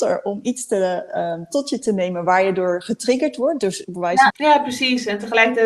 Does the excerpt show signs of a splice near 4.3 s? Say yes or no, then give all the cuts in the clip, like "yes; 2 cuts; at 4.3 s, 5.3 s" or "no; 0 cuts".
yes; 1 cut; at 4.3 s